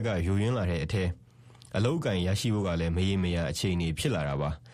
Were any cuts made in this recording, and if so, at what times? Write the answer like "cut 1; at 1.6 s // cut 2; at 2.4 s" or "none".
none